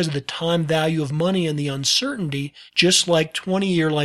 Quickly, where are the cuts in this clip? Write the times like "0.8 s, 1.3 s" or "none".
2.7 s